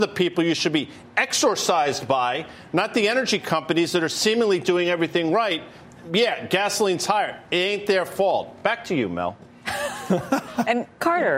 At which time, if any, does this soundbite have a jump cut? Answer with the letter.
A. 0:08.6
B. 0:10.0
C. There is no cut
C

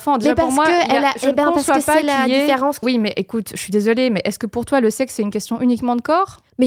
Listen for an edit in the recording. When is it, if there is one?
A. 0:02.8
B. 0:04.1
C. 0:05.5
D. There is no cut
A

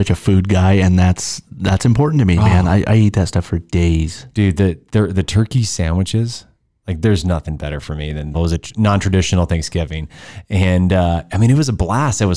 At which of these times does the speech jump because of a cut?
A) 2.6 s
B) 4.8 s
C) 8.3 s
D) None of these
C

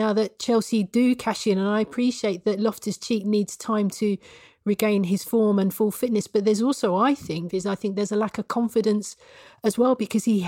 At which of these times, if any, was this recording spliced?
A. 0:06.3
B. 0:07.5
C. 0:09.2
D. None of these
B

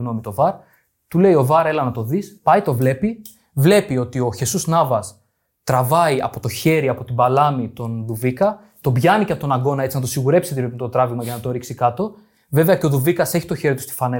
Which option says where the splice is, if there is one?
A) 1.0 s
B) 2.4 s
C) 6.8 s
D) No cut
D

